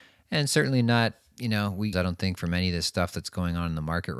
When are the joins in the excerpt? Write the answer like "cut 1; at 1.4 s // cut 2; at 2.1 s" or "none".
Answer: cut 1; at 1.9 s